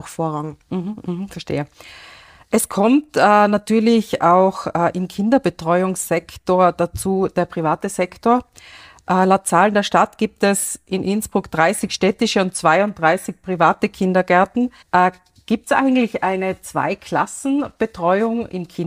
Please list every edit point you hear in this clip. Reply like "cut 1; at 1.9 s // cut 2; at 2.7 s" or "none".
cut 1; at 14.8 s